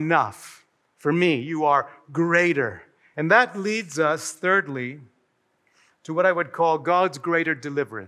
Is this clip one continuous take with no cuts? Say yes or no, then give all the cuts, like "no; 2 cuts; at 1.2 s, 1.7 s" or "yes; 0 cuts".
no; 1 cut; at 3.1 s